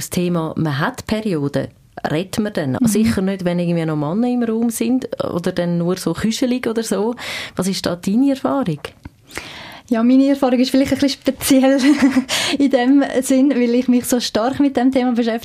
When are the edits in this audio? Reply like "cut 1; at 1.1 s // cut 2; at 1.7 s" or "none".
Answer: cut 1; at 2.8 s